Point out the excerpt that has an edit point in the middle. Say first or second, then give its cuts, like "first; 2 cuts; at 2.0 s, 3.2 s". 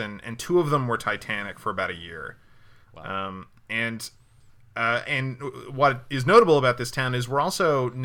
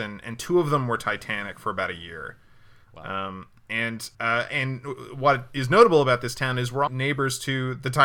second; 2 cuts; at 4.1 s, 6.9 s